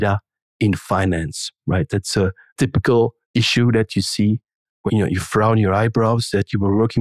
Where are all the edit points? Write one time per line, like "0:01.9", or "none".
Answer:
0:03.2
0:04.9